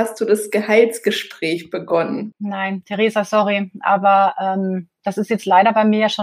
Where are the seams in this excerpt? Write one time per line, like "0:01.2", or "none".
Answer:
0:02.3